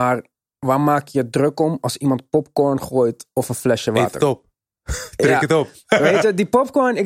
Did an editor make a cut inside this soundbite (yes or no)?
no